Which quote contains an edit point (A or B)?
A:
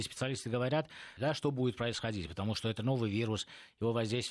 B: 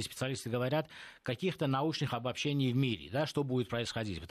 A